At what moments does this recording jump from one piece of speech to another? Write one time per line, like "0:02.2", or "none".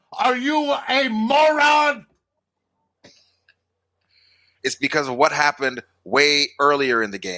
0:04.6

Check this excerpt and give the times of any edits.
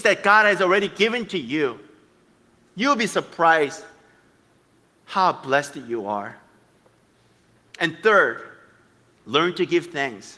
0:09.2

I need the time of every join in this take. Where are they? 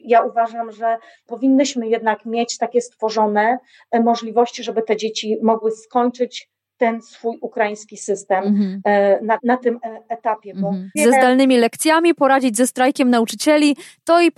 0:09.4
0:11.0

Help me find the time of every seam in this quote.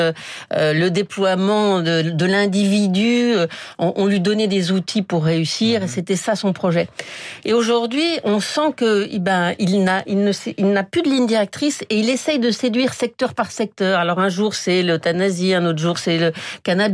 none

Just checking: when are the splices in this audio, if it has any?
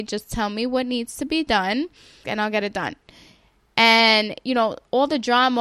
0:02.2

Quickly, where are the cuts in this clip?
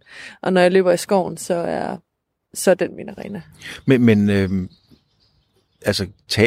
none

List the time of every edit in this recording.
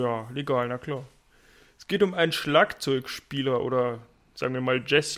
none

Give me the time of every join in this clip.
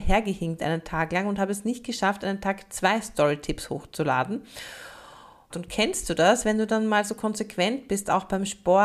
0:05.5

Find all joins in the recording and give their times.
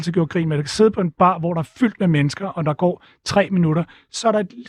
none

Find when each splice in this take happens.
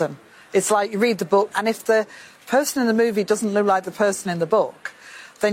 0:01.5

